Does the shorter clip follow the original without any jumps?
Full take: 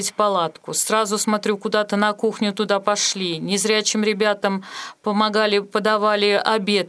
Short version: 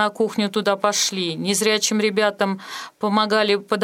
yes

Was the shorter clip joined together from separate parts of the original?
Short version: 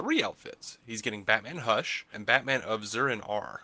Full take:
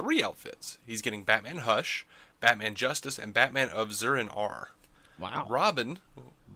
yes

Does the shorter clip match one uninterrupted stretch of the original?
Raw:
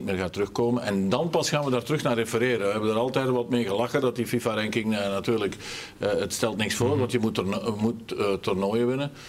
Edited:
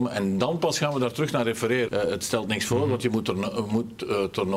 no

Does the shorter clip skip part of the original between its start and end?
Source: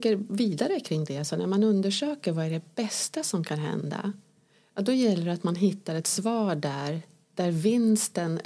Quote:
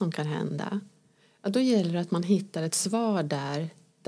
no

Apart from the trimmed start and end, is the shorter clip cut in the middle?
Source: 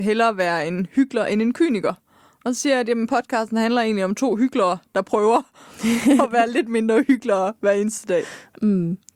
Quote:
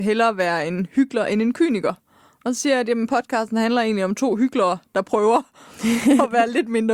no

